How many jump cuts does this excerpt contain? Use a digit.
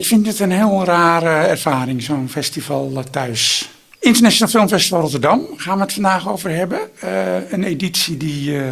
1